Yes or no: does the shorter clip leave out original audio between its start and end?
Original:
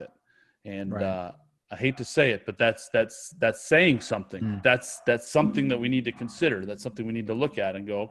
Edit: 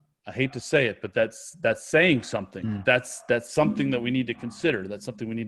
yes